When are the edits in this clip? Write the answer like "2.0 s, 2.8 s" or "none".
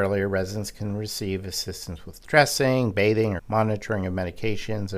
3.4 s

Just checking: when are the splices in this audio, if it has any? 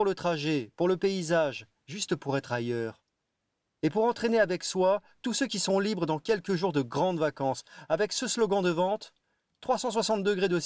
none

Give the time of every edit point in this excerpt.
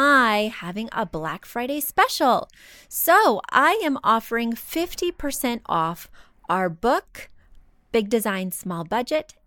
none

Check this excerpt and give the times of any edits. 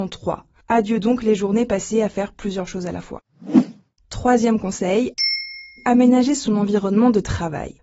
none

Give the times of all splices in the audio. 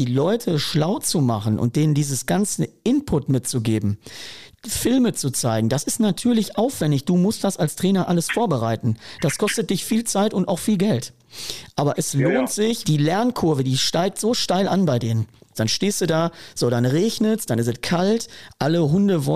12.8 s, 15.5 s

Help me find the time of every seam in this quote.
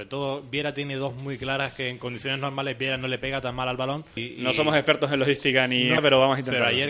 4.2 s, 6.0 s

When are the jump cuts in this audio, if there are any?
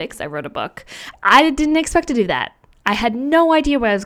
1.1 s

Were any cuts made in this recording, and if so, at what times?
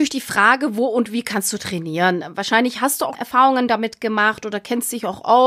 3.1 s

